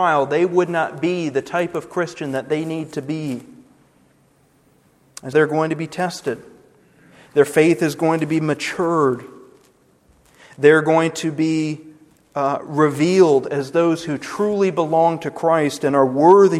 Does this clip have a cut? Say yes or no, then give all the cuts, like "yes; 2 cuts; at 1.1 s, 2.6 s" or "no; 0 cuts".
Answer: yes; 1 cut; at 5.3 s